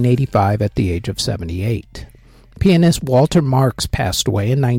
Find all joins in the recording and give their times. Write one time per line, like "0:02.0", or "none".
none